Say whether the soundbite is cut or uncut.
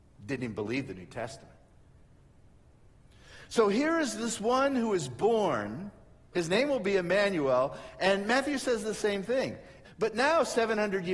cut